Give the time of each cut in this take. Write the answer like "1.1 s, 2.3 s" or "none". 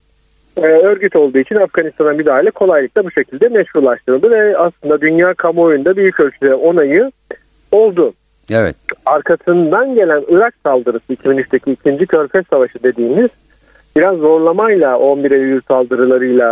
none